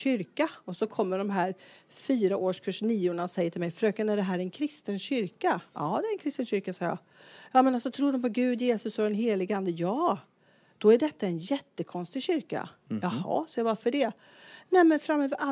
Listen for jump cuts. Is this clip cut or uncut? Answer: uncut